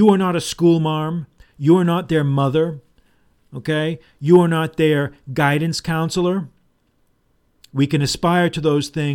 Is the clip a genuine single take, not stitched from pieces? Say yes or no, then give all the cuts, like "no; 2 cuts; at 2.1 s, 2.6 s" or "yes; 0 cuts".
yes; 0 cuts